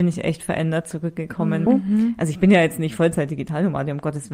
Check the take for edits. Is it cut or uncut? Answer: cut